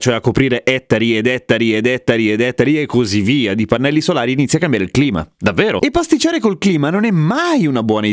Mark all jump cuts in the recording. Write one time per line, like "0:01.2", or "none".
0:05.8